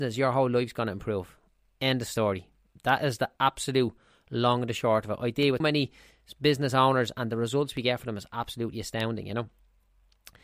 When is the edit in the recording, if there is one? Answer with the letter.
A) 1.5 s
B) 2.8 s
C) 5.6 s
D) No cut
C